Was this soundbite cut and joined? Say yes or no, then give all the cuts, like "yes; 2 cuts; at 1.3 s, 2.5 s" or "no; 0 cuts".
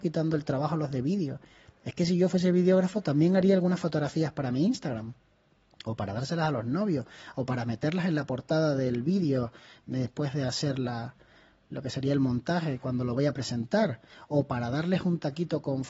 no; 0 cuts